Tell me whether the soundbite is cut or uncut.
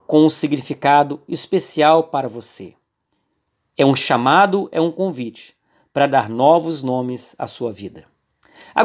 uncut